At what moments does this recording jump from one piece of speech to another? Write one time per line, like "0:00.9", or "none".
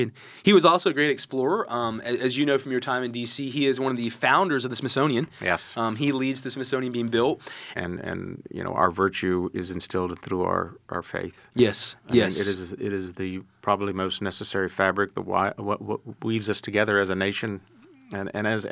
0:07.7
0:12.0